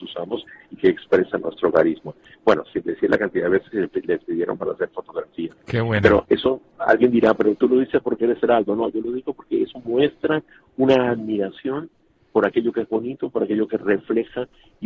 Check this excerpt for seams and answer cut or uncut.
uncut